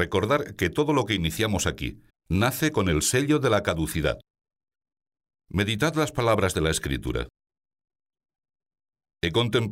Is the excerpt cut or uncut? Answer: cut